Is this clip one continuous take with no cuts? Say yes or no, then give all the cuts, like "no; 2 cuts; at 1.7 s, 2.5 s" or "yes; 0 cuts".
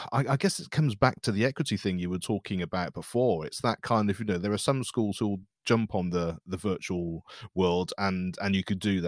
yes; 0 cuts